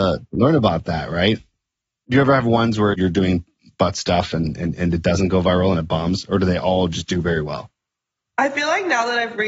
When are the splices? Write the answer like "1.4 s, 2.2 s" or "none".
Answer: 2.9 s